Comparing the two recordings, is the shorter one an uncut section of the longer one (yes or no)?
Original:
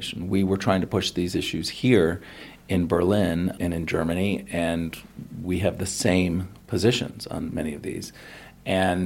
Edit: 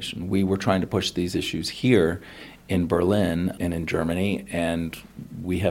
yes